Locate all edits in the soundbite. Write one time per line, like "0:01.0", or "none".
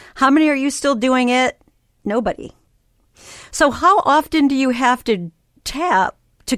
none